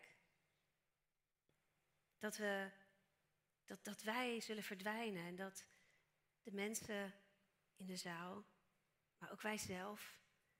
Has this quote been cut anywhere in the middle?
no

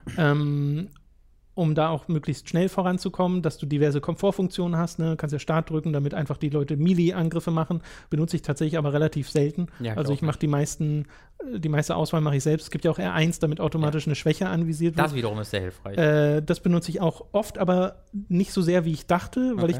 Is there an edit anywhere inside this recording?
no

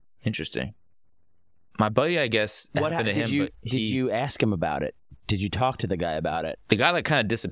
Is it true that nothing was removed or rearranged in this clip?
yes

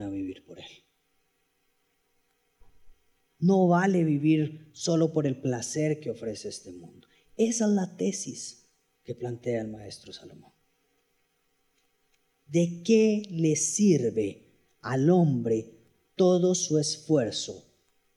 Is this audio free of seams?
no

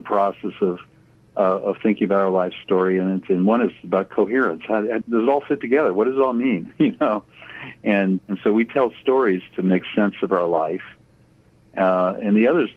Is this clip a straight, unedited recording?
no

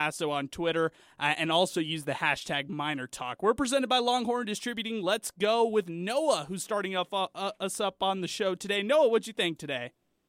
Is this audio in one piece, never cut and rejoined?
yes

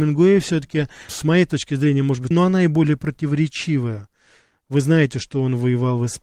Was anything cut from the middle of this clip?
yes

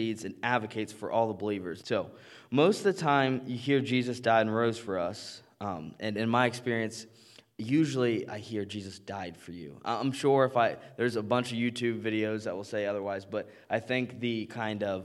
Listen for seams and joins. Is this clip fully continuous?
no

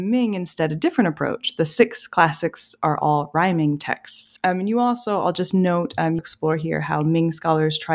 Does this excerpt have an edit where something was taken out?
yes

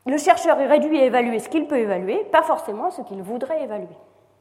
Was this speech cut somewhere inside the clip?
no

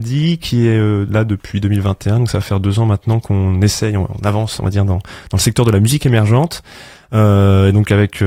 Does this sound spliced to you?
no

